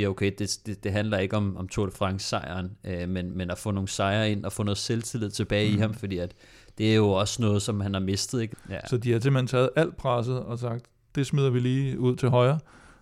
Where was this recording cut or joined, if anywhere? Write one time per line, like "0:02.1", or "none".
0:08.5